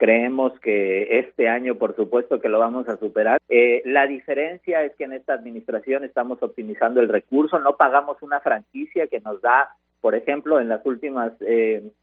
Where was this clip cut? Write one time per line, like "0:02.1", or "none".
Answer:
0:03.4